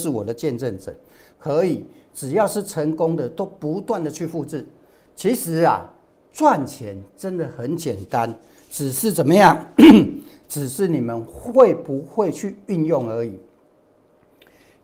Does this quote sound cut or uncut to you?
cut